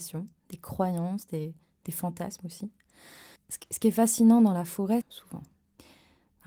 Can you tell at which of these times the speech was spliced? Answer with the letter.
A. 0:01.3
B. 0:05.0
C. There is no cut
B